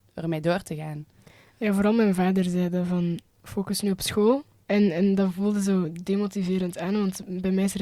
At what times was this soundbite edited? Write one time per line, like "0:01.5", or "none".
0:04.6